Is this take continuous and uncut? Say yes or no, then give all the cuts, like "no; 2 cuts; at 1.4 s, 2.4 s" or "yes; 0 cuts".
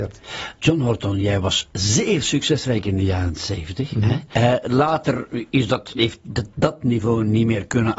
no; 2 cuts; at 4.3 s, 5.9 s